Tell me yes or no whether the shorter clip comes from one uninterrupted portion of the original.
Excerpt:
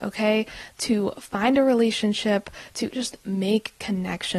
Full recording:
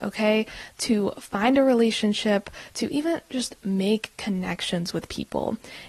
no